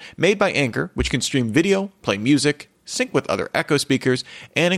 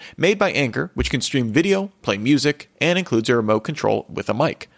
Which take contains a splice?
second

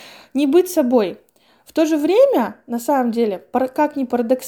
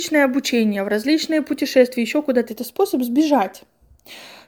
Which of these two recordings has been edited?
second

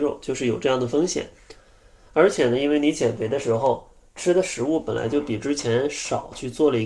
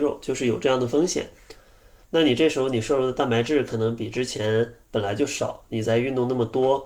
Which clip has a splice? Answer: second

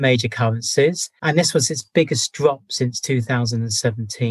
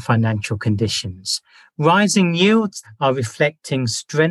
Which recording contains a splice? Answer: second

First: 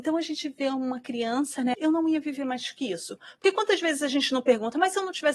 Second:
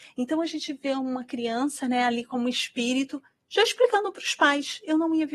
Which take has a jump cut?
first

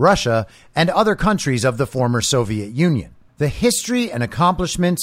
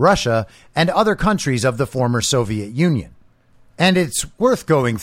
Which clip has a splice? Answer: first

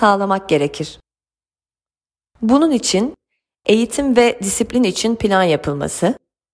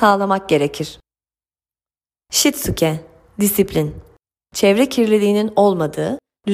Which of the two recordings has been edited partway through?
second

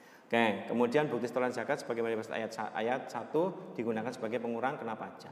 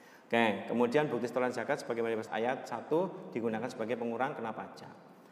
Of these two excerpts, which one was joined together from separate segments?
second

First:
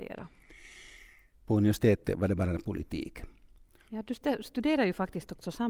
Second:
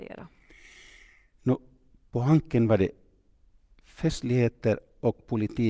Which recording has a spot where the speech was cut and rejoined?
first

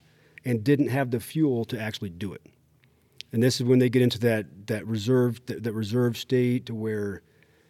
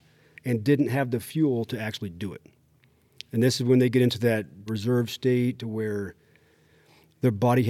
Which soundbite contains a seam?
second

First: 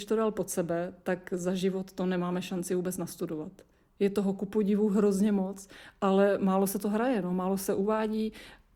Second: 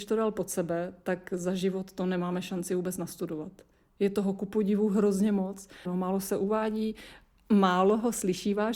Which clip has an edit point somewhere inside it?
second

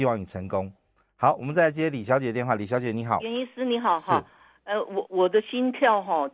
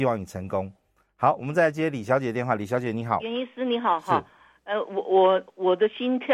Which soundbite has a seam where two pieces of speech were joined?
first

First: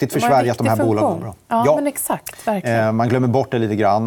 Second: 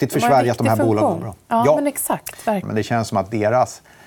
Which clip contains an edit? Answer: second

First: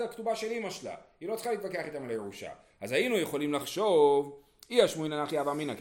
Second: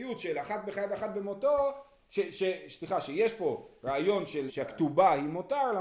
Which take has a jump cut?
second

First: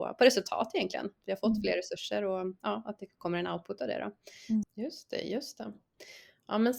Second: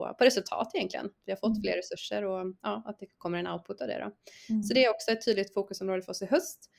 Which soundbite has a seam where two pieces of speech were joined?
first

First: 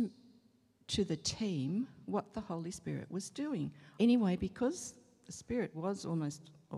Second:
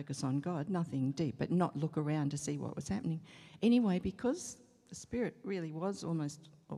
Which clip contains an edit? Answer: first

